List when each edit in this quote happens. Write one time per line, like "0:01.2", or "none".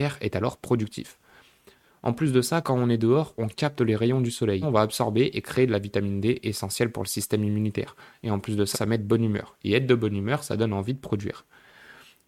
0:04.6
0:08.7